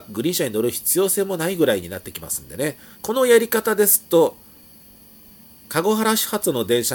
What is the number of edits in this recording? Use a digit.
1